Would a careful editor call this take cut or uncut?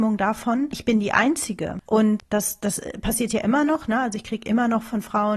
uncut